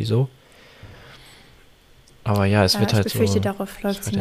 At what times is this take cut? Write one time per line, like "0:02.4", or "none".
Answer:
none